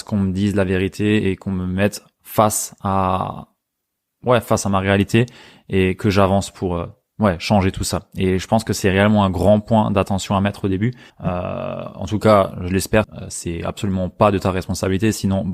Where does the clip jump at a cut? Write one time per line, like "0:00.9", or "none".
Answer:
0:11.1
0:13.0